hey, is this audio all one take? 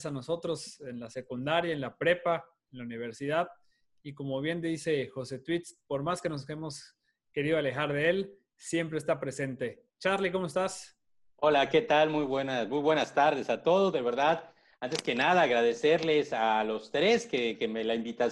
yes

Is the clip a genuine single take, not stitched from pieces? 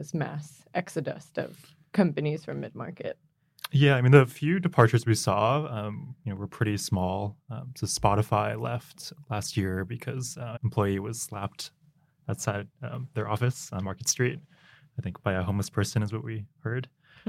no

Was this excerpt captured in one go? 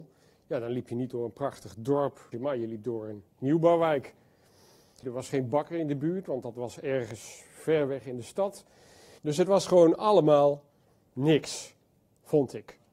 no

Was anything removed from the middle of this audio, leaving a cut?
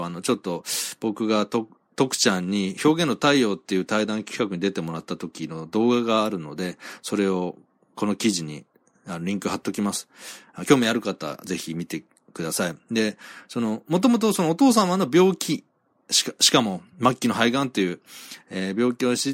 no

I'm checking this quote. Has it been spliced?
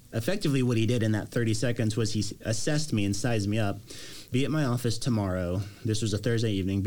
yes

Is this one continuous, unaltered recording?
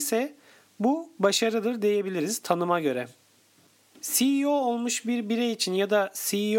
no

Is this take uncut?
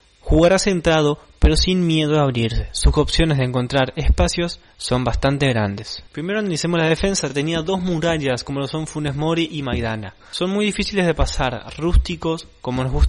yes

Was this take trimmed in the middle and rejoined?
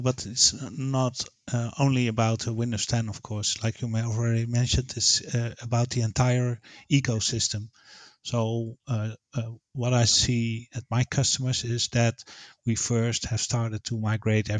no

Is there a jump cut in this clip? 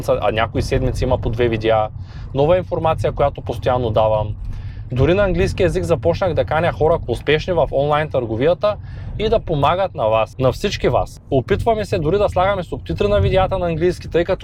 yes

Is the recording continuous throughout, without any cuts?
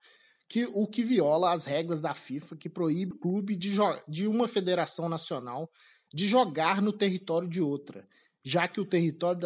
no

